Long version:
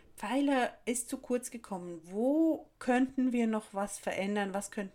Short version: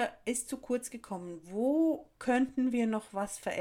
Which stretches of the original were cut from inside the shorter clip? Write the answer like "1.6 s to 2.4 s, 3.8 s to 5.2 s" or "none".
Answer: none